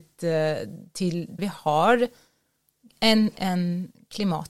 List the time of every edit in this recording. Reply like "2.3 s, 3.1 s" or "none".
1.4 s